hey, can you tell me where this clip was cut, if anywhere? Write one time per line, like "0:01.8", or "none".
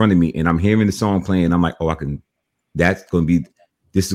none